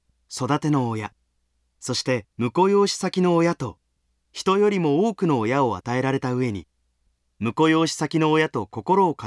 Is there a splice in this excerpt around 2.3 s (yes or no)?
yes